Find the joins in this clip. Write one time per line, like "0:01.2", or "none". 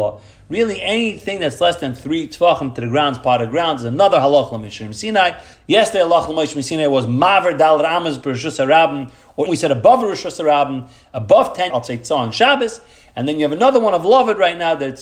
0:05.5
0:09.5
0:11.7

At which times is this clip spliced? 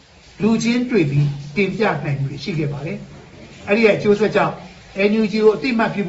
none

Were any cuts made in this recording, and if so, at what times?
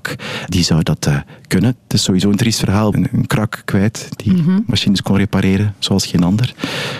0:01.8
0:02.9

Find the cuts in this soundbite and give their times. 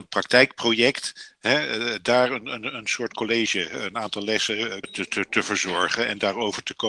0:04.8

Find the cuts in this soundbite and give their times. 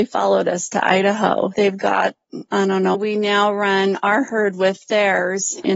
0:01.5
0:02.9

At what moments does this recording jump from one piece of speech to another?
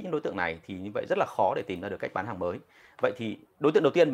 none

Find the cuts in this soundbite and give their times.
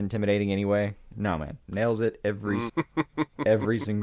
0:01.1
0:02.7

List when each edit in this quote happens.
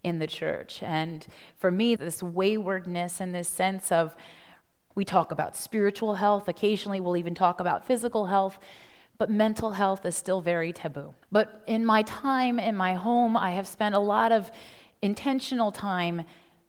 0:02.0
0:04.9
0:11.2

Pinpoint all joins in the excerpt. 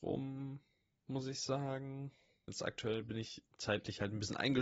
0:02.5

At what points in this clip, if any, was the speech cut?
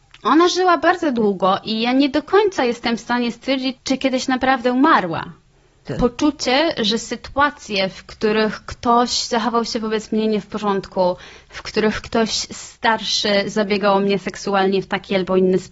0:03.8
0:05.9

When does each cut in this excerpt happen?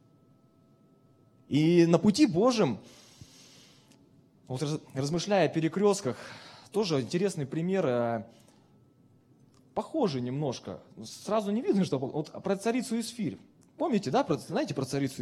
none

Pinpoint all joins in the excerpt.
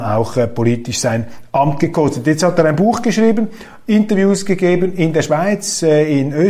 none

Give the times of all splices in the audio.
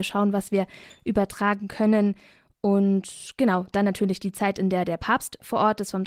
none

